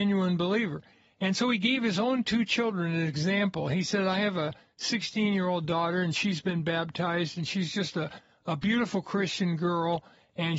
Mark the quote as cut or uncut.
uncut